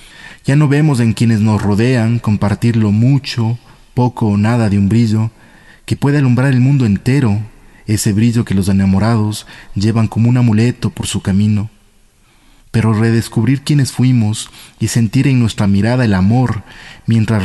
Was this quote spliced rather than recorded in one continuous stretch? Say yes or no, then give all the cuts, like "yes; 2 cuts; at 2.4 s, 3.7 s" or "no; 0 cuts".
no; 0 cuts